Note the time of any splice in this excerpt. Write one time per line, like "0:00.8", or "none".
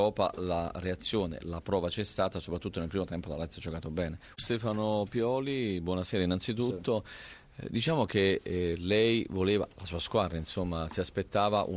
0:04.3

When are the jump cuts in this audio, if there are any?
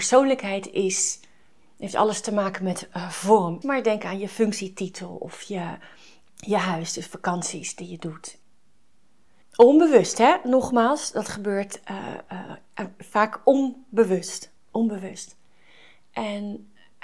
0:03.6

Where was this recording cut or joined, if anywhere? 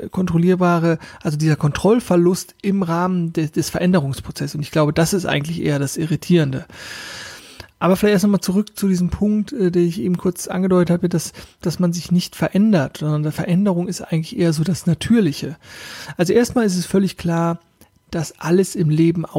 0:11.6

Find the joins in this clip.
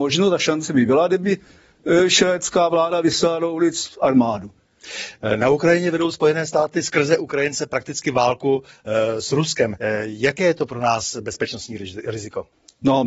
0:09.8

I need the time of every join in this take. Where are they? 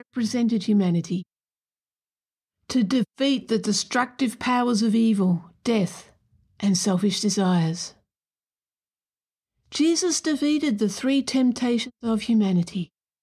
none

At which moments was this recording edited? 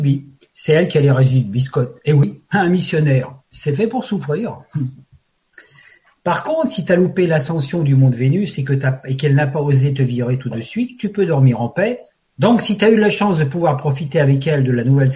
0:12.2

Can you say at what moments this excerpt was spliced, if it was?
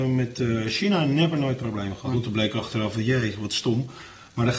0:02.1

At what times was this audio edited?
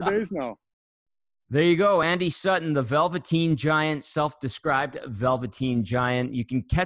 none

